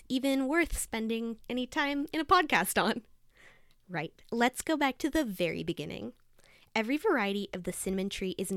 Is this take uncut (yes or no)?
yes